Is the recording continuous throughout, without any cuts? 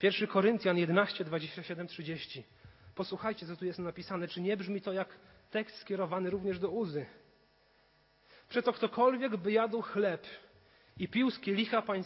yes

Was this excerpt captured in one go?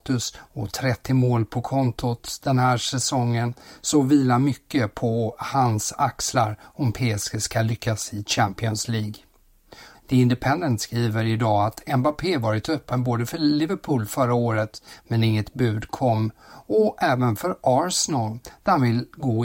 no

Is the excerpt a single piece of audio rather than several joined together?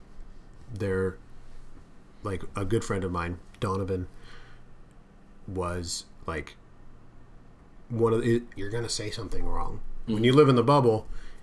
no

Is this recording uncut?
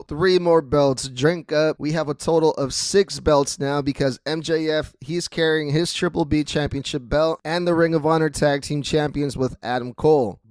yes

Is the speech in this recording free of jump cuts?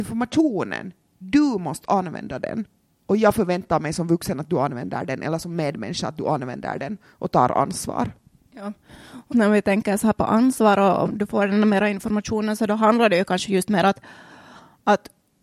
no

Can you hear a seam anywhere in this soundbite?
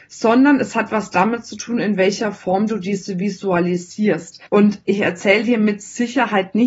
yes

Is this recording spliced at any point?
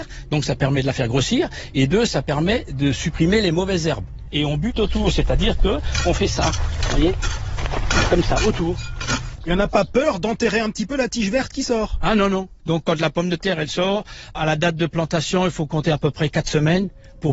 no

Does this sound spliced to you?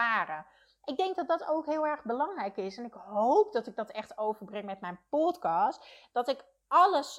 no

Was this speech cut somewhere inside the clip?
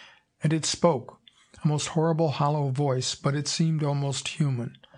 no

